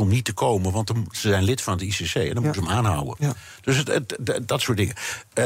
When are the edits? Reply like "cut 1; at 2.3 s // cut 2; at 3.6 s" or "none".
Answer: none